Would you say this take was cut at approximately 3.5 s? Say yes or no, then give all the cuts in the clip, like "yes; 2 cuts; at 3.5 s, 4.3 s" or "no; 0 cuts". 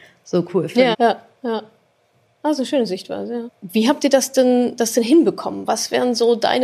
yes; 2 cuts; at 0.9 s, 3.5 s